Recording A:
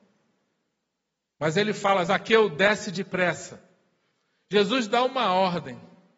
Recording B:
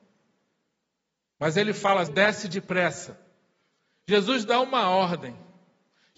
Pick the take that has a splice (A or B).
B